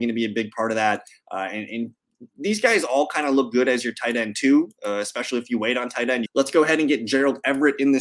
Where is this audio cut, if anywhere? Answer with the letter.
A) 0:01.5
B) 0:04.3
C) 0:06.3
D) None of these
C